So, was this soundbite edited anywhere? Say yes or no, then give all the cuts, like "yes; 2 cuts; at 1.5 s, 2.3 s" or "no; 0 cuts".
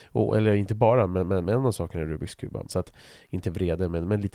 yes; 1 cut; at 2.7 s